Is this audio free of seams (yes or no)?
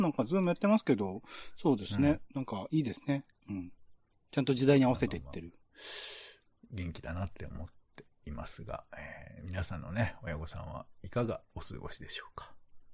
yes